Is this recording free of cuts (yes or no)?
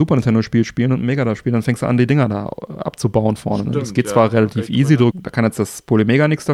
no